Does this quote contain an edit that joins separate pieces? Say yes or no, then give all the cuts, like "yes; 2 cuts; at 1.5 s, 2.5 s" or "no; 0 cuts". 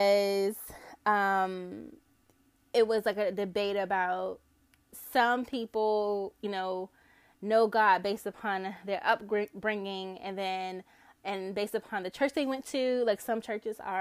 no; 0 cuts